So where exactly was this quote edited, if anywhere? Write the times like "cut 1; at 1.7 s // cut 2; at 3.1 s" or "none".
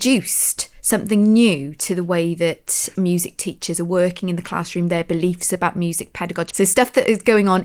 cut 1; at 6.5 s